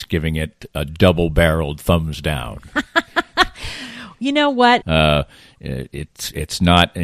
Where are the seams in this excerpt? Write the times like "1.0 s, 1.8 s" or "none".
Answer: 4.8 s